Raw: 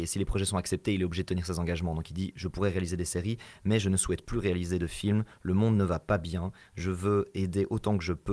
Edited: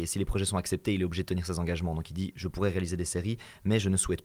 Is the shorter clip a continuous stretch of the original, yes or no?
yes